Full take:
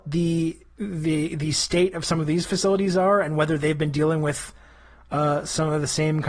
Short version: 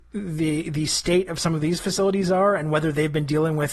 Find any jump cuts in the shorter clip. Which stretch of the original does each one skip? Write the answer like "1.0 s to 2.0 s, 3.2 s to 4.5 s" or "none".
none